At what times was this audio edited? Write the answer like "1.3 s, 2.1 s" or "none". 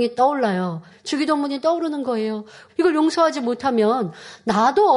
0.9 s, 2.7 s